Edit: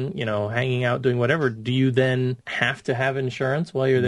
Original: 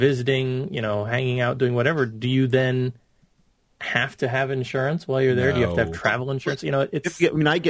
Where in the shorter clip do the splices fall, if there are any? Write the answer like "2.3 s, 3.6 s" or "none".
2.4 s